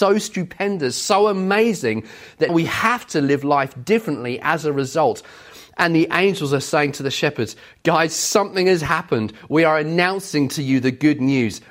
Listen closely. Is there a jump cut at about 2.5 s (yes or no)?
yes